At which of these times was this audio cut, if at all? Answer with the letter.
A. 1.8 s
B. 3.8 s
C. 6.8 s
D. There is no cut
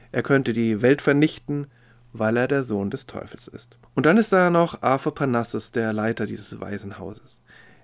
B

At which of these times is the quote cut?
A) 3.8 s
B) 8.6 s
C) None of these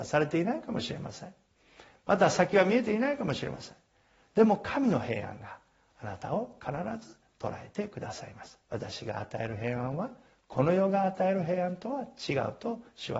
B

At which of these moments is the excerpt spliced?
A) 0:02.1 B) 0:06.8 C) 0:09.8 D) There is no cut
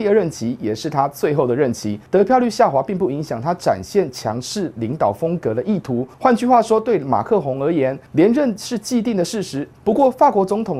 C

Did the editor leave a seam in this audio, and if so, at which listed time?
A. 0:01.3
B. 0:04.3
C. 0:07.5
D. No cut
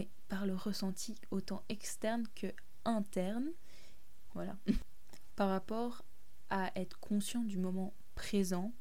B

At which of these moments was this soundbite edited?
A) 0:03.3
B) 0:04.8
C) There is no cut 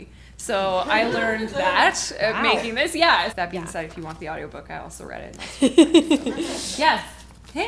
A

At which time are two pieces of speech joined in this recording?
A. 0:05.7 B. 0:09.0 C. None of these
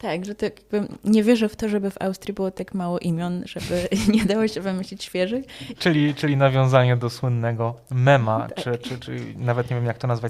A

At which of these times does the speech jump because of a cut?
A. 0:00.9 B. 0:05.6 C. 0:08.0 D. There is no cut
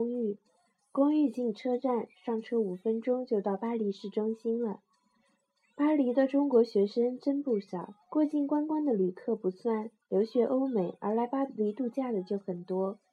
C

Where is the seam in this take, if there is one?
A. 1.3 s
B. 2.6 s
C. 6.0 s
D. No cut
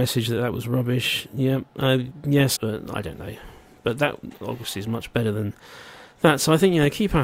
B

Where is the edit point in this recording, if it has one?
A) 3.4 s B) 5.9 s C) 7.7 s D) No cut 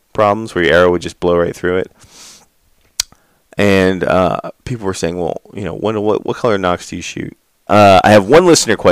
C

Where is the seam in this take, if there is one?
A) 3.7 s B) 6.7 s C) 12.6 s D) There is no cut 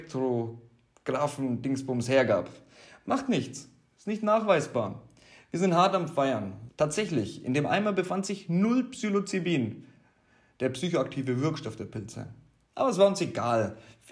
B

